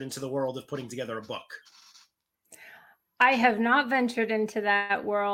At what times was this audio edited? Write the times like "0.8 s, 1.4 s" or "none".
none